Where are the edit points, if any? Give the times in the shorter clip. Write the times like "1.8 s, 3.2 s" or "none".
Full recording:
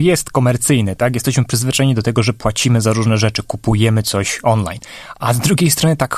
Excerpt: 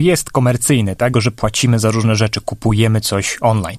1.1 s